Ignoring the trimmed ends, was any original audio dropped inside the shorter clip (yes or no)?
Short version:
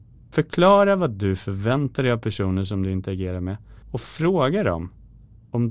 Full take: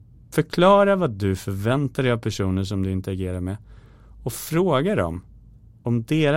yes